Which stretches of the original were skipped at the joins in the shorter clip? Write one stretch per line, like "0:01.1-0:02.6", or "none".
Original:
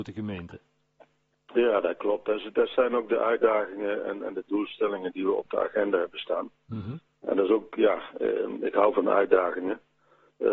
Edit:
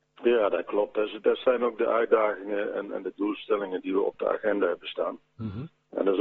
none